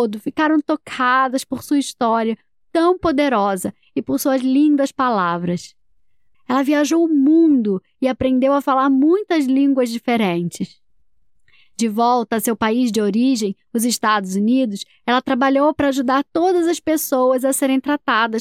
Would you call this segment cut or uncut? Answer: cut